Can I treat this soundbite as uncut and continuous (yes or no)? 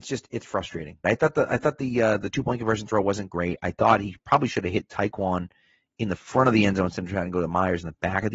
no